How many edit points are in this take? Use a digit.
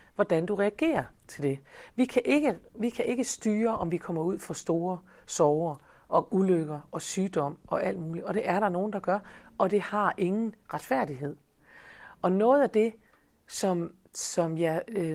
0